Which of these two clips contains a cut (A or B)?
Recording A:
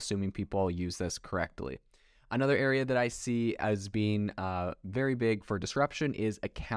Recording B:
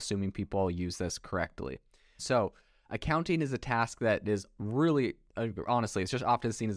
B